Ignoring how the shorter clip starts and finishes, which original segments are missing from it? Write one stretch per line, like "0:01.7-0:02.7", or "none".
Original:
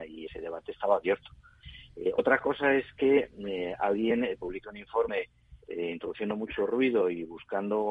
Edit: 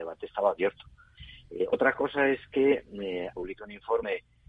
0:03.8-0:04.4